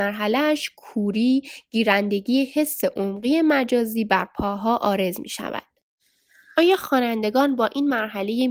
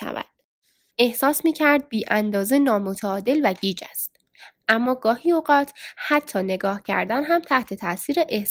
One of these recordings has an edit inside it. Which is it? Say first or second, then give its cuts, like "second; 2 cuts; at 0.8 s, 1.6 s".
second; 1 cut; at 0.9 s